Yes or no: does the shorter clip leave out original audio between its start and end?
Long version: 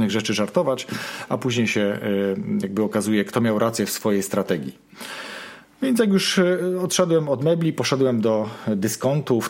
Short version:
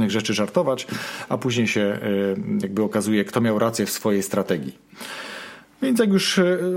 no